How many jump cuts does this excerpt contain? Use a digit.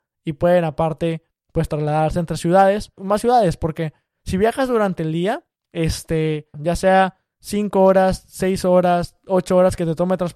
2